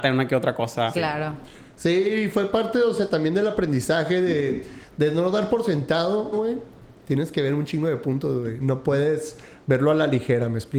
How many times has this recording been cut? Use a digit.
2